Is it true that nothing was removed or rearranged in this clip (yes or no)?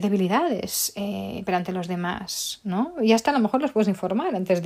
yes